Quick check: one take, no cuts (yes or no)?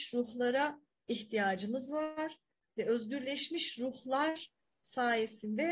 yes